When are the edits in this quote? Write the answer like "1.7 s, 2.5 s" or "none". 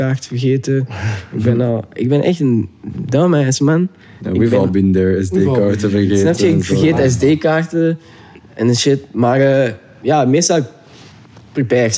none